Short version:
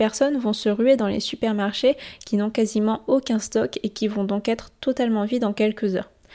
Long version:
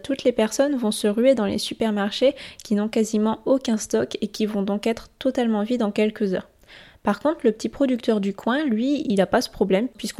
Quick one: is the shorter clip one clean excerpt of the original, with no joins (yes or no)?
yes